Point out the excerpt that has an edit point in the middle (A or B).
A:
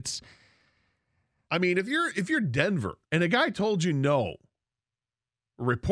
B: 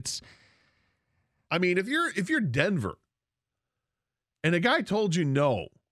A